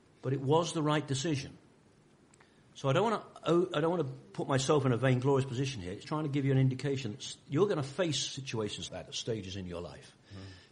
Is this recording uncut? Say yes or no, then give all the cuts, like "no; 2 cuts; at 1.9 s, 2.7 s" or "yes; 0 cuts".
no; 2 cuts; at 6.0 s, 8.9 s